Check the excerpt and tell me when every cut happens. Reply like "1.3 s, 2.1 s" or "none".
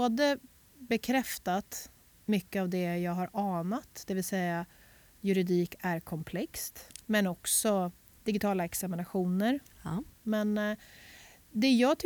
7.0 s, 10.1 s